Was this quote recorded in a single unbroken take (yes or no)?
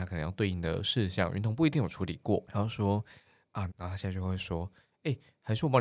no